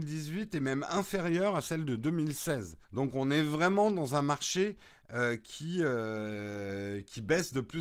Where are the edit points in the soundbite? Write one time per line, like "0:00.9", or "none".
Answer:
0:02.8